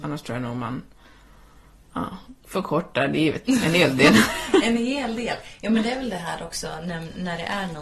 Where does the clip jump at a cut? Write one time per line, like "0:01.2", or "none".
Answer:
0:03.4